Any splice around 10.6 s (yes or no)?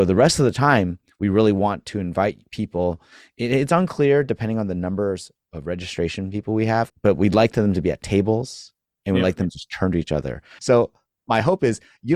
yes